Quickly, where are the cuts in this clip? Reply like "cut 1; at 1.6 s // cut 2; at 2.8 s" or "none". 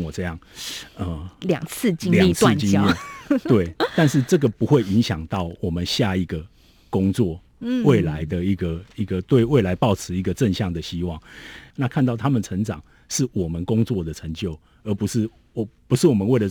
cut 1; at 11.7 s